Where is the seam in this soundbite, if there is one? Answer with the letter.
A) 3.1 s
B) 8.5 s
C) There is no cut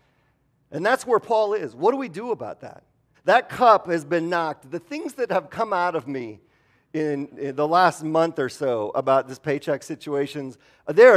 A